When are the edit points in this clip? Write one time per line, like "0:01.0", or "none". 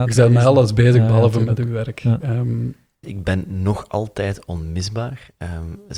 0:03.0

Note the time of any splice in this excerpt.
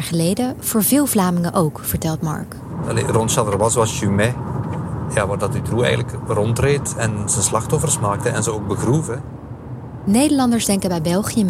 0:02.8

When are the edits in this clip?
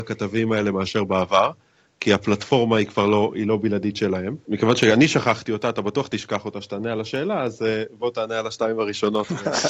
0:04.5

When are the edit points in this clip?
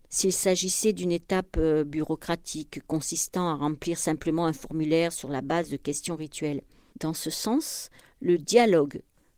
0:06.9

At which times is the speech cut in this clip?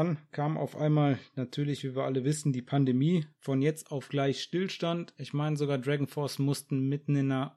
none

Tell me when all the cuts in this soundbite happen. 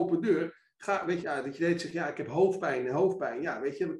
0:01.2

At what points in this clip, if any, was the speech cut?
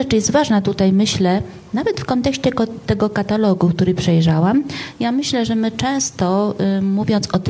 none

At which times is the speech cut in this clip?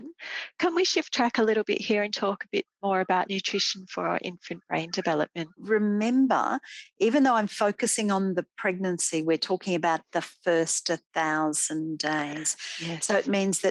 none

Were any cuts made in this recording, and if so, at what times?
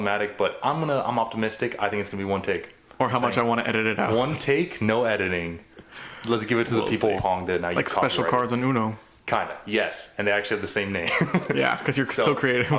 0:07.2

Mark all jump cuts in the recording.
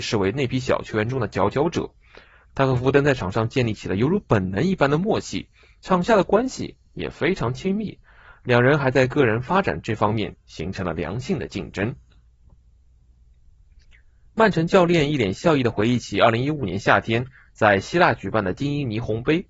none

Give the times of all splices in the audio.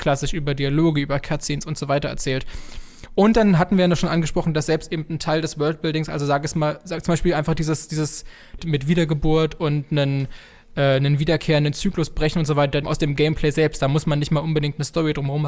0:08.6
0:12.8

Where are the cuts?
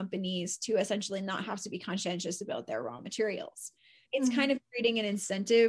0:04.1

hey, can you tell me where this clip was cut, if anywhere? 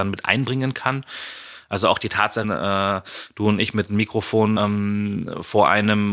0:02.4
0:04.6

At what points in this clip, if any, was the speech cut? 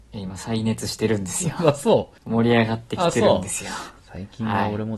0:02.2

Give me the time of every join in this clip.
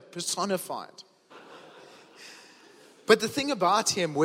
0:01.3

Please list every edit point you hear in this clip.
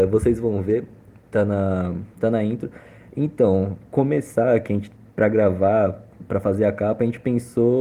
none

